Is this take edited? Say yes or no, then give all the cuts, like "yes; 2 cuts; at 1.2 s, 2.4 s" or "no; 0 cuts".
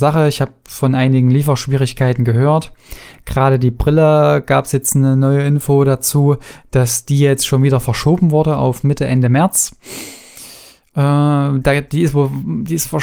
no; 0 cuts